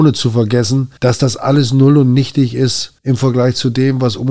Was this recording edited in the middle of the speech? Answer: yes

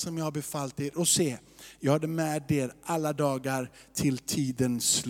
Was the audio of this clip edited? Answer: no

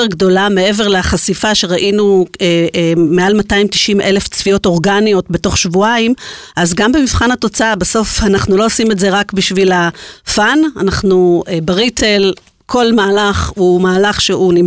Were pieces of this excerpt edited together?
no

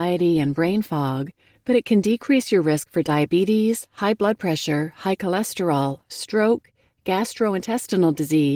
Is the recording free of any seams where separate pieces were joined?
no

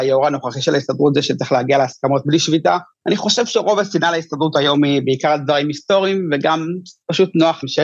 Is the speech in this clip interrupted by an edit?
no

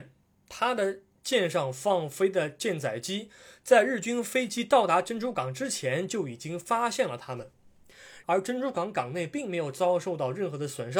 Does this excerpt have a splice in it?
yes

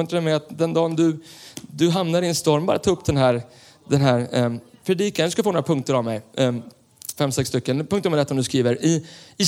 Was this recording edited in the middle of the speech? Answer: yes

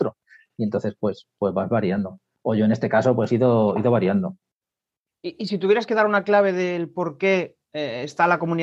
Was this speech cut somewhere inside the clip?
no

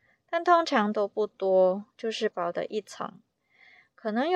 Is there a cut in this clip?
yes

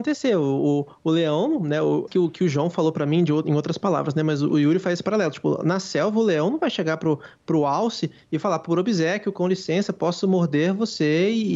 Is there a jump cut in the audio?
yes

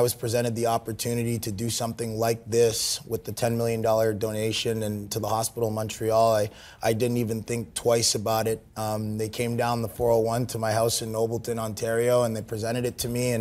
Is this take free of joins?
yes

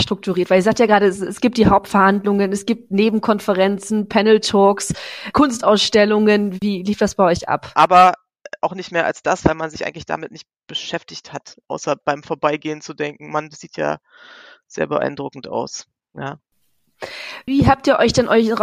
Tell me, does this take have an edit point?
yes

